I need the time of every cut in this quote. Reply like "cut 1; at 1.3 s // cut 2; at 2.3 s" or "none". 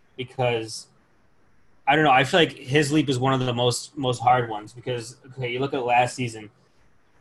none